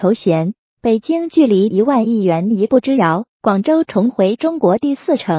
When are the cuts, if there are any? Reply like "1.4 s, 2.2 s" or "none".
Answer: 3.3 s